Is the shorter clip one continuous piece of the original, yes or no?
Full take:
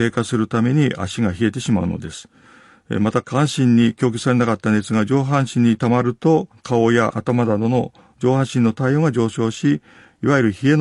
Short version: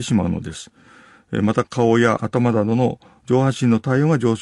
no